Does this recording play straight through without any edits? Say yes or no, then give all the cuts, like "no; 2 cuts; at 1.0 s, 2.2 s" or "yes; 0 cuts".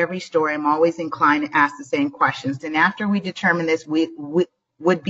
no; 1 cut; at 2.6 s